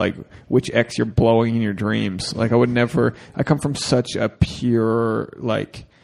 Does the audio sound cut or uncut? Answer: uncut